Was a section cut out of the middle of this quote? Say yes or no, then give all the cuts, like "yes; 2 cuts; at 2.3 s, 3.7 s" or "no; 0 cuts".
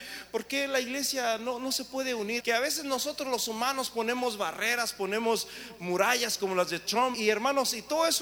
yes; 2 cuts; at 2.4 s, 7.1 s